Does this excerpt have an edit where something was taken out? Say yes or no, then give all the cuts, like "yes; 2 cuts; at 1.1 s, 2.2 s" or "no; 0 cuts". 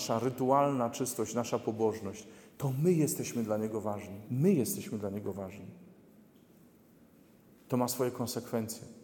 yes; 1 cut; at 4.3 s